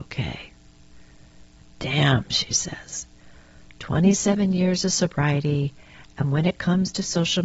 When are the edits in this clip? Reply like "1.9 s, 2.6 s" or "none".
none